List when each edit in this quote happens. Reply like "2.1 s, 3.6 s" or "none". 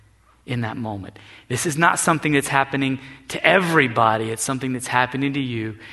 none

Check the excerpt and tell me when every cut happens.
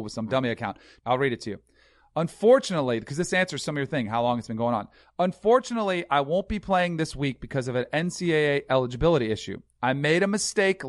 1.0 s

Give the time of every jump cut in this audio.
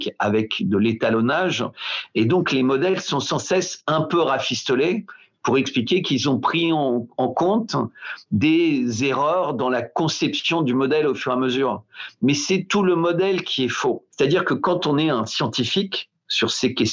14.1 s

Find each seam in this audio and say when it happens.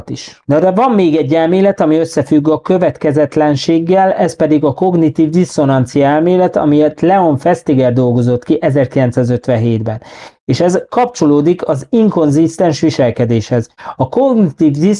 none

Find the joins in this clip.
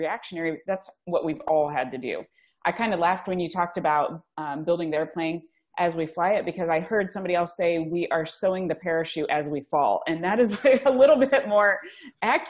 none

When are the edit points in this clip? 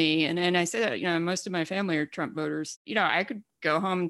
none

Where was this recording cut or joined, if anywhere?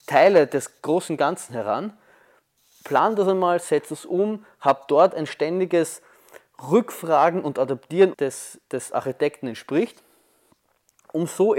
8.1 s

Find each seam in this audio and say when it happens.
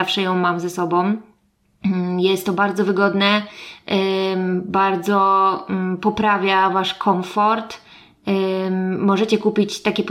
none

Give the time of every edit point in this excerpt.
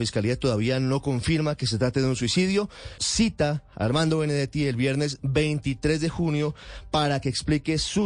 3.0 s

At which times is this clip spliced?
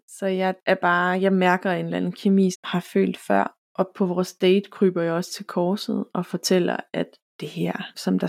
2.5 s, 3.6 s

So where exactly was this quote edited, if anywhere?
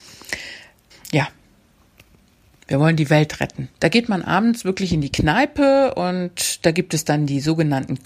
0.9 s, 3.8 s

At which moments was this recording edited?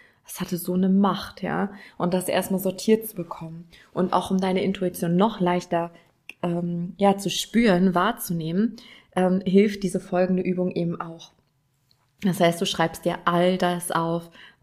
none

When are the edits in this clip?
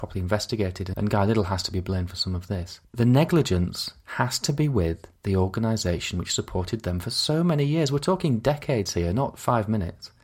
none

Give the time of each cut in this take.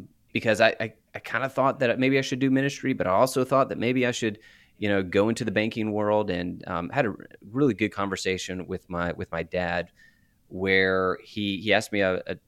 none

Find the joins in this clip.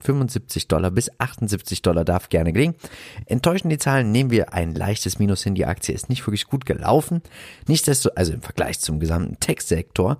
none

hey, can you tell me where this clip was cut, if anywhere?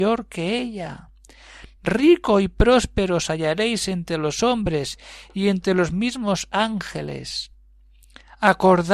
none

